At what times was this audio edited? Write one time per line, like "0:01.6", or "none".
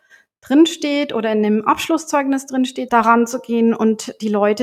0:02.9